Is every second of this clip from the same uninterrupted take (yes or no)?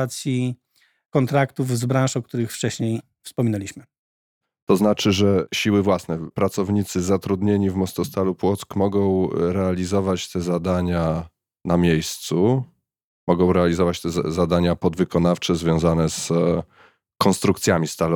yes